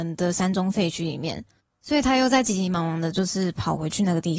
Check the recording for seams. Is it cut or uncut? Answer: uncut